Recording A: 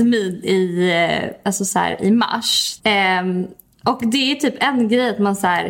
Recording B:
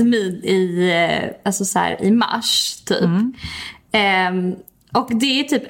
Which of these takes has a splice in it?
A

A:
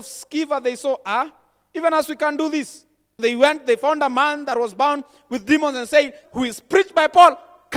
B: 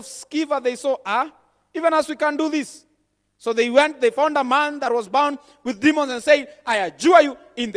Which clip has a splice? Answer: A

